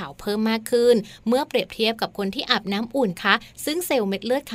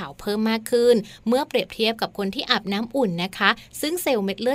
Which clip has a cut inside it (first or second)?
first